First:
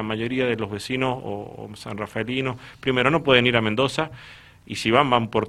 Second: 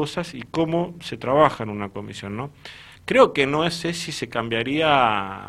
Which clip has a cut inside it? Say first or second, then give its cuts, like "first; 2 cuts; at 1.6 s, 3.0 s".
second; 1 cut; at 3.0 s